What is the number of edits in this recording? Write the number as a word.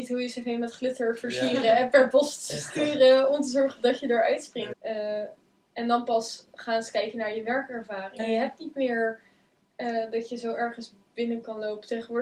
two